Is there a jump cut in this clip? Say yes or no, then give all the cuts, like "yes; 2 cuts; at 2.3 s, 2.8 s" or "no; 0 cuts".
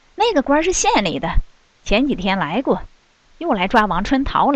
no; 0 cuts